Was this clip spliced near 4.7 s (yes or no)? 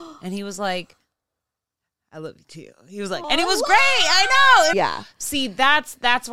yes